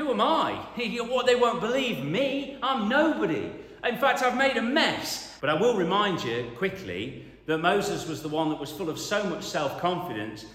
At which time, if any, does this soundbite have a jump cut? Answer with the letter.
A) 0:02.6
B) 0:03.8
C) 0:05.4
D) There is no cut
C